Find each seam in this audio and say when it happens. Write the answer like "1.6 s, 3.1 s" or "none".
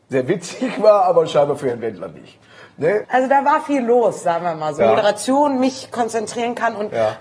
3.0 s, 4.8 s